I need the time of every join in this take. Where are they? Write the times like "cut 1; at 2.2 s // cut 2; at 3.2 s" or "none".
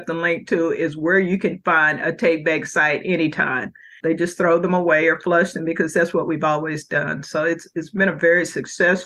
cut 1; at 4.0 s